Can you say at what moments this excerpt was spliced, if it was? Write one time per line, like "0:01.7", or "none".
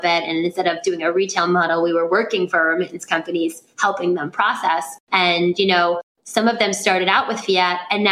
0:05.0

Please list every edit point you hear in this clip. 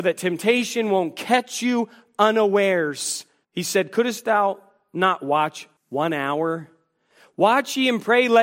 0:03.4
0:05.8

